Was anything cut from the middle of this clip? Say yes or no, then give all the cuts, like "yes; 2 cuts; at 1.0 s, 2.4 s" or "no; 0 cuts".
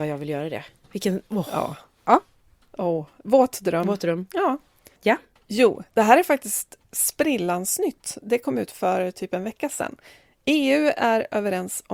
yes; 1 cut; at 5.0 s